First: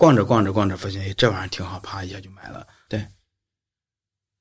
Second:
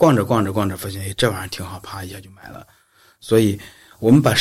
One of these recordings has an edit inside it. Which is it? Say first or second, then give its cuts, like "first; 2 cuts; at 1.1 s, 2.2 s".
first; 1 cut; at 2.9 s